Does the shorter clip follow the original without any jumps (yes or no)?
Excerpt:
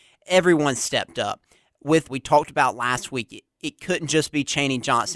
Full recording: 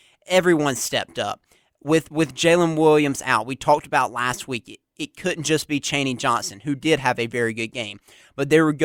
no